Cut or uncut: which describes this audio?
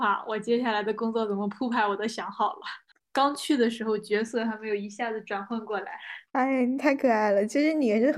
cut